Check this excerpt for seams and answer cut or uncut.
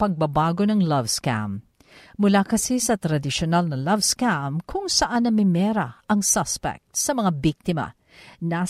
uncut